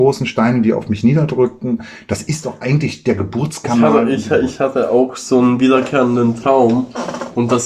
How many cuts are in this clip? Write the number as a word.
zero